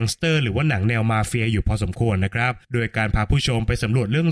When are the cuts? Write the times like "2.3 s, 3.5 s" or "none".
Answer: 2.6 s

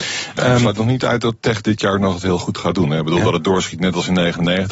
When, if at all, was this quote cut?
none

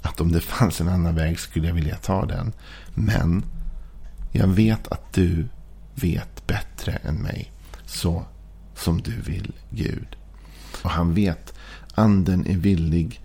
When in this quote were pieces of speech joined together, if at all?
10.8 s

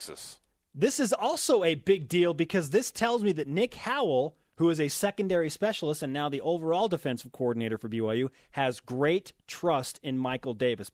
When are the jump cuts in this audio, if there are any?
none

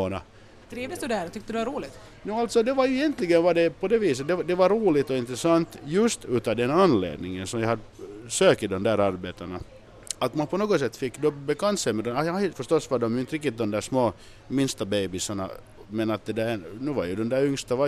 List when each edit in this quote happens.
12.5 s

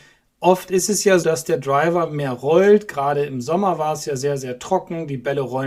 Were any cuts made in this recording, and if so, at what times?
1.2 s

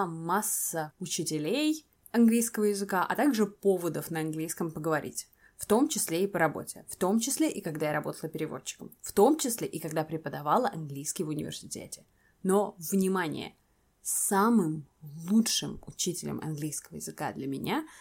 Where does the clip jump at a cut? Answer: none

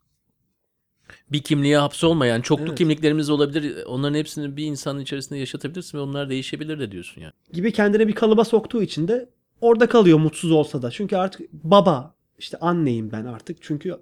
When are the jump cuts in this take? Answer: 7.3 s

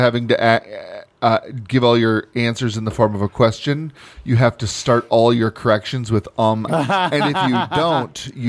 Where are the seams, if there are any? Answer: 6.7 s

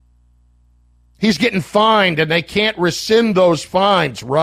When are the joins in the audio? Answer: none

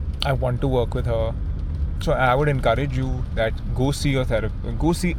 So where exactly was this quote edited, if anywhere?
2.0 s

